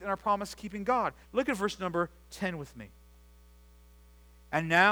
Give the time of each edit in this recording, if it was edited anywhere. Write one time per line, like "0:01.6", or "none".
0:01.2